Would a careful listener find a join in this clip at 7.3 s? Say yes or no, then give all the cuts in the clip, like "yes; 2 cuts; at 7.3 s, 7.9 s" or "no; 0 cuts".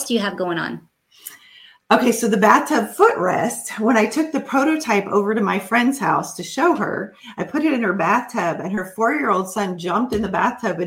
no; 0 cuts